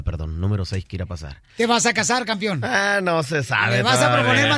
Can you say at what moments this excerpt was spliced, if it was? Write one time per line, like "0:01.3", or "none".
none